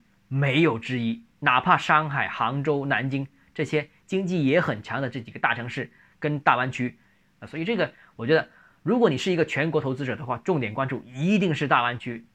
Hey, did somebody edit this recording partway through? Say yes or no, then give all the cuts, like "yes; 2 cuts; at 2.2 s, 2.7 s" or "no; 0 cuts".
yes; 1 cut; at 7.4 s